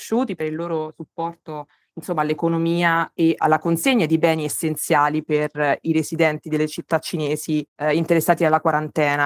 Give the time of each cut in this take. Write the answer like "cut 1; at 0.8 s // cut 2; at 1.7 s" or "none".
none